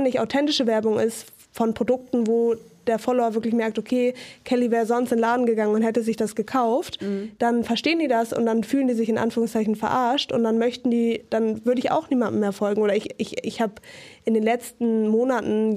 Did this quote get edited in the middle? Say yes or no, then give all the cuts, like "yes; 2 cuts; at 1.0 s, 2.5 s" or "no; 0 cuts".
no; 0 cuts